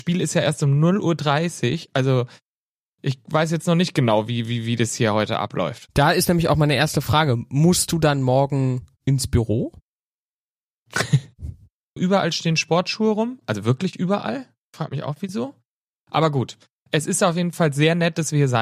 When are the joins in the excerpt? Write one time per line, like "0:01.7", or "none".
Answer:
0:12.0